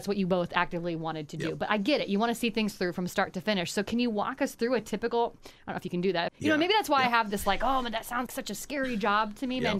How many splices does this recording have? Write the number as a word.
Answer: two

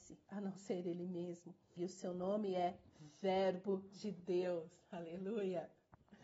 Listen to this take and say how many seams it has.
one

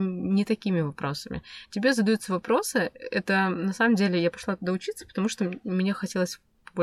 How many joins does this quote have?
zero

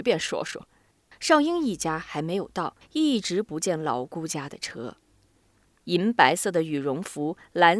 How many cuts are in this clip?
three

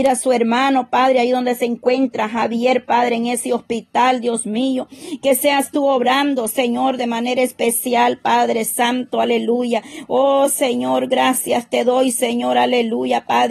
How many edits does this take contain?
zero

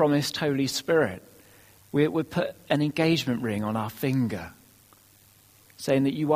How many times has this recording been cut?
one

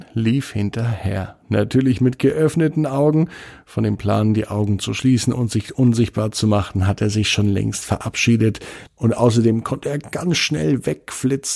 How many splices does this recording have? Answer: one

